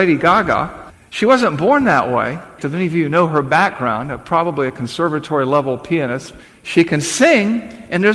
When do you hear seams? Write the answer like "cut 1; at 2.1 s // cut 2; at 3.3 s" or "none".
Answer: cut 1; at 2.6 s